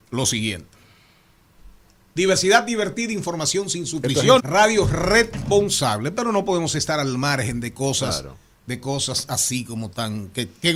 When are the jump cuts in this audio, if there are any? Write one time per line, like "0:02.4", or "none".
0:04.4

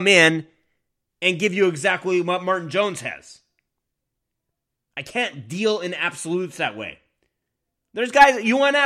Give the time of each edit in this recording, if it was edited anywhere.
none

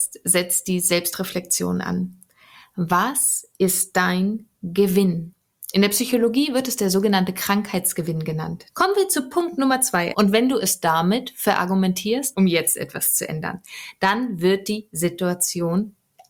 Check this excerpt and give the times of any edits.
0:08.7
0:10.1
0:12.3

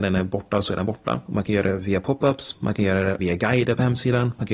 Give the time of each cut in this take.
0:01.3

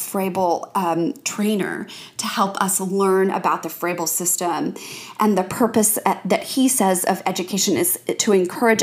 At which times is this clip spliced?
none

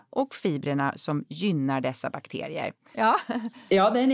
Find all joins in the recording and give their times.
0:02.9

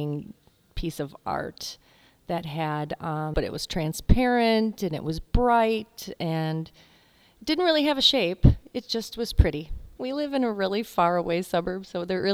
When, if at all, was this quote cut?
0:03.3
0:10.0

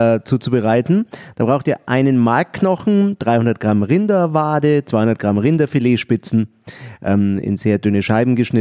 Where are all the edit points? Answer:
none

